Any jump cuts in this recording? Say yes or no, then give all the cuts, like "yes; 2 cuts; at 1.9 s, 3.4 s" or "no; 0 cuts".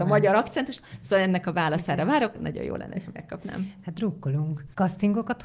no; 0 cuts